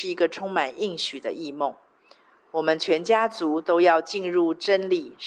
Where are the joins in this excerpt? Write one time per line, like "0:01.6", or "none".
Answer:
none